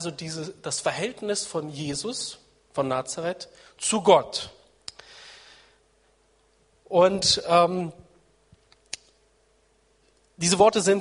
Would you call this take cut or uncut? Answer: uncut